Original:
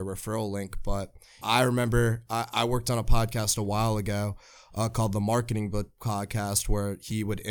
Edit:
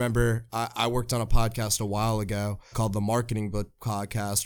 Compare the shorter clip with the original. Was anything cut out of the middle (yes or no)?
yes